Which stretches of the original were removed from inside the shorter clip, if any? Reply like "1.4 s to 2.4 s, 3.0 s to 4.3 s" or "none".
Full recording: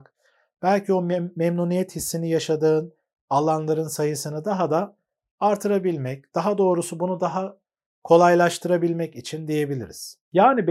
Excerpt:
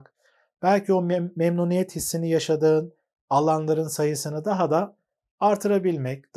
none